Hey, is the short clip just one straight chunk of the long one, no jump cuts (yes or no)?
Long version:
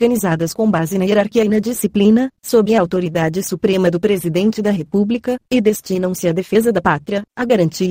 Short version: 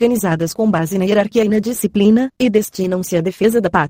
no